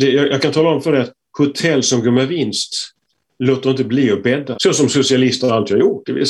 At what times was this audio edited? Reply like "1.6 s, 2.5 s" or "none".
4.5 s